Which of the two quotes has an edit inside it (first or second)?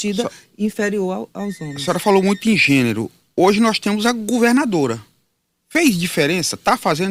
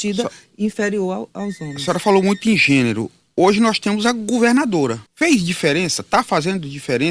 second